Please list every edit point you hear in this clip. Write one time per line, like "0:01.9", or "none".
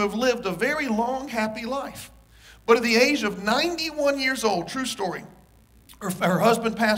none